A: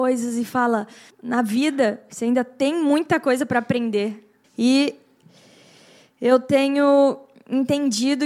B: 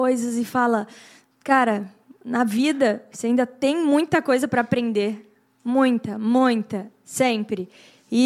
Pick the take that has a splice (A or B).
A